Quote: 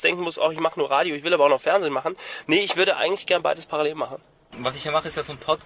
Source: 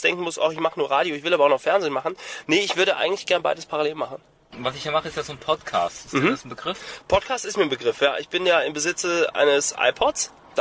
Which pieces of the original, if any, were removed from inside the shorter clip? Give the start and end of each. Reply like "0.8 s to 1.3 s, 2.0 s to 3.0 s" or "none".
none